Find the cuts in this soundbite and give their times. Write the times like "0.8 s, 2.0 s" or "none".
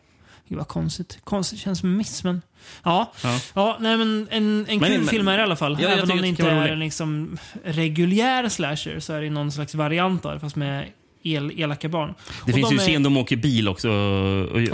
none